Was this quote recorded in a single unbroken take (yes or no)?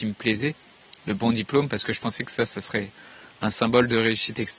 no